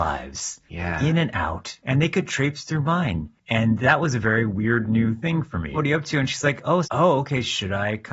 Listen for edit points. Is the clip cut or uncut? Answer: cut